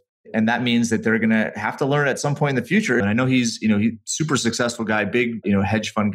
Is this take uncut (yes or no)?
no